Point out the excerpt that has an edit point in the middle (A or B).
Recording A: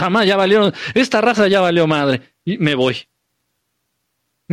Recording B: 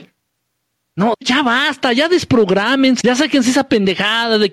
B